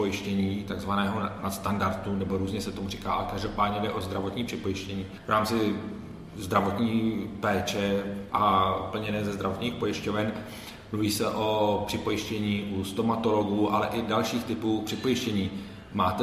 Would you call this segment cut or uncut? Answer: uncut